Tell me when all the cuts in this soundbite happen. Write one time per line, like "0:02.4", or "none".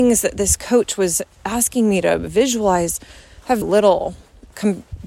0:03.6